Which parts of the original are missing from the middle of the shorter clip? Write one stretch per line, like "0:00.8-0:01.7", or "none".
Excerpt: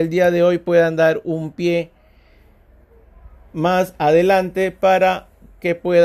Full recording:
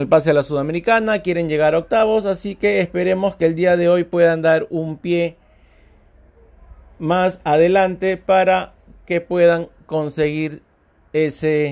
none